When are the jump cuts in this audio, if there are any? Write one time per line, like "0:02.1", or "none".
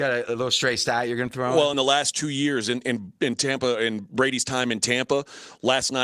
none